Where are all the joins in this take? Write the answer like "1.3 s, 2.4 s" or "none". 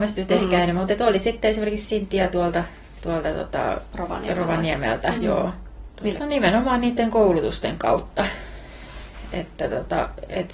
5.2 s, 6.2 s